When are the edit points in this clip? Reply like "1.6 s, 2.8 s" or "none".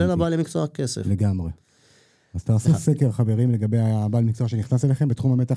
2.4 s